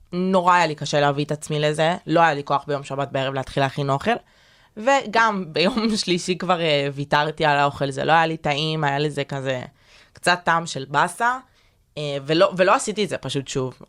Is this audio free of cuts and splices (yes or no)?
yes